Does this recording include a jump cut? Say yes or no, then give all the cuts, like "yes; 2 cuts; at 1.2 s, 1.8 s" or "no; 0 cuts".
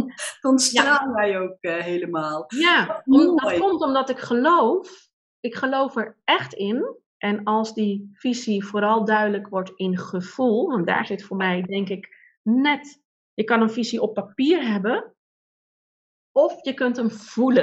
yes; 1 cut; at 7.1 s